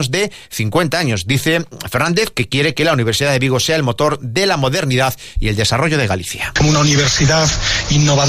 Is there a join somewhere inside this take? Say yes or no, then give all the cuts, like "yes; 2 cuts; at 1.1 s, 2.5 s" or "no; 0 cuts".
no; 0 cuts